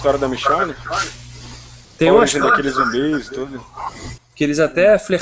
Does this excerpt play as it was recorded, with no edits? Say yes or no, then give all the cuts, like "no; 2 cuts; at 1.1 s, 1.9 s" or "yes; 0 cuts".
no; 1 cut; at 4.2 s